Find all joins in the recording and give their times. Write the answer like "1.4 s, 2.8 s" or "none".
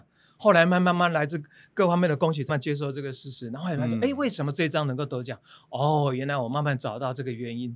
2.5 s